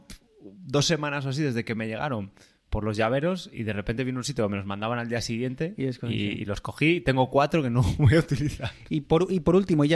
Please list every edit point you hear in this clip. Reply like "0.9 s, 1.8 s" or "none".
none